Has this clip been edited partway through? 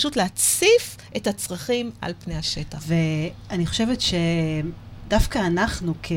yes; 1 cut; at 2.8 s

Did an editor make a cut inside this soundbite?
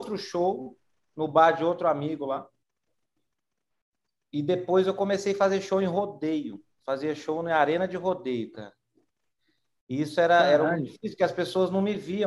no; 0 cuts

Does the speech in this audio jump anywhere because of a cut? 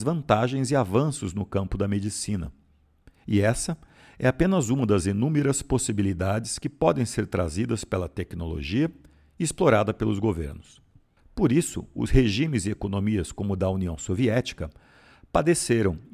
yes; 1 cut; at 11.2 s

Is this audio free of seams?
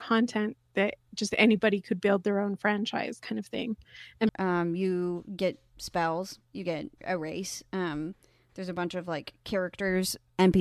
no; 1 cut; at 4.3 s

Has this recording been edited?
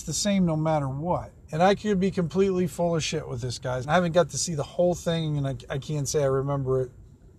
yes; 2 cuts; at 1.5 s, 3.8 s

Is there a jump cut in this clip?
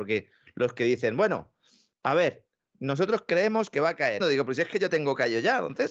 yes; 1 cut; at 4.2 s

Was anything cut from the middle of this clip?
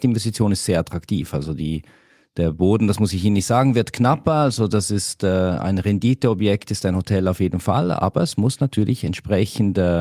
no; 0 cuts

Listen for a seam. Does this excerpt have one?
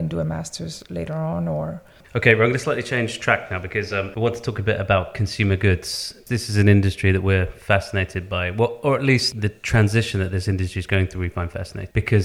no; 0 cuts

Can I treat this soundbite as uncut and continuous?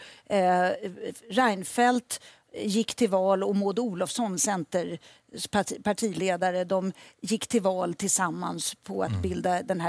yes; 0 cuts

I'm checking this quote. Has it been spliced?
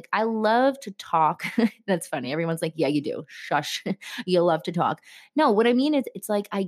no; 0 cuts

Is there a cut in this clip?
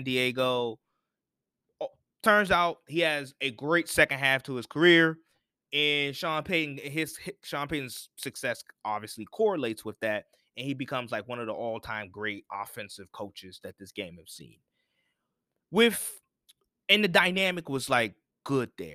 no; 0 cuts

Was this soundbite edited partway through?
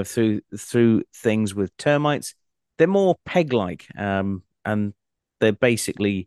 no; 0 cuts

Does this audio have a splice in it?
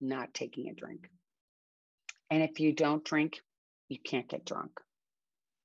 no; 0 cuts

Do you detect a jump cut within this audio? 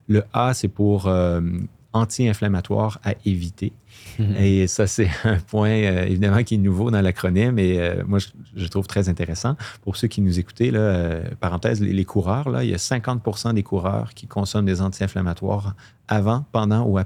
no; 0 cuts

